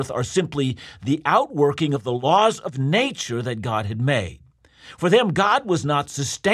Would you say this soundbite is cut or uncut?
uncut